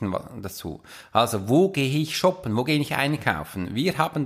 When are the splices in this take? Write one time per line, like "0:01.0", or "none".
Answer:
none